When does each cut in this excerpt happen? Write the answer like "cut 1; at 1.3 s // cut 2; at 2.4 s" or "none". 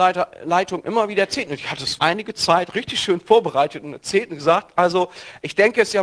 cut 1; at 2.0 s